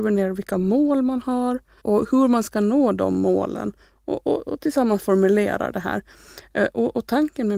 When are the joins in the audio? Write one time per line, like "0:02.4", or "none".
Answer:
0:01.8